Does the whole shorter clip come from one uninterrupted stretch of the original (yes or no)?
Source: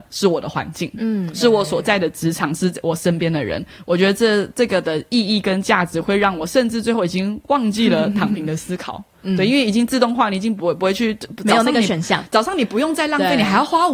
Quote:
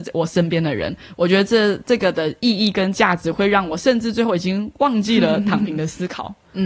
yes